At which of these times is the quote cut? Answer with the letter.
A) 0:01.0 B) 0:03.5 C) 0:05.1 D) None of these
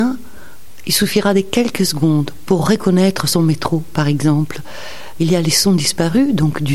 C